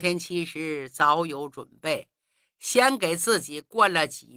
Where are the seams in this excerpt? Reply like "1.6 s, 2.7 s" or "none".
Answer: none